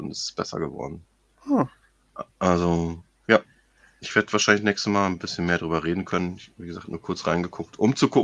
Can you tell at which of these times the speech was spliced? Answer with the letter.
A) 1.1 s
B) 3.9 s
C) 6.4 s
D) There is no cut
D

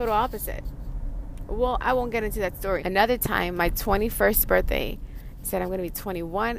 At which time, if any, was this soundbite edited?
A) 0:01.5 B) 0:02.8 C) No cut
B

